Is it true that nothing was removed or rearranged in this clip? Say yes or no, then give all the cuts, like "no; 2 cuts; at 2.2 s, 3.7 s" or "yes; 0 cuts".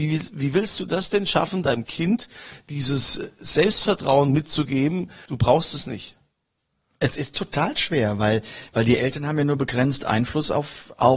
no; 1 cut; at 5.3 s